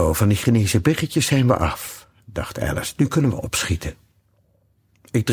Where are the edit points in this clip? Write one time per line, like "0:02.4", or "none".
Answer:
none